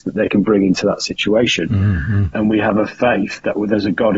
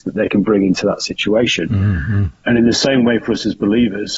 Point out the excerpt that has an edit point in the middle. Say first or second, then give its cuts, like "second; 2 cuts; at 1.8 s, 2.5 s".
first; 1 cut; at 2.3 s